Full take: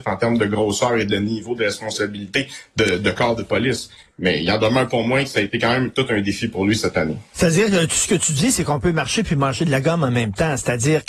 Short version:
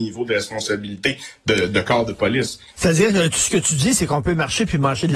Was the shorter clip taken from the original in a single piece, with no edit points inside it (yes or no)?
no